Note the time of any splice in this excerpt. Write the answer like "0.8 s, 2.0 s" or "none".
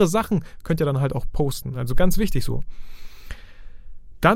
none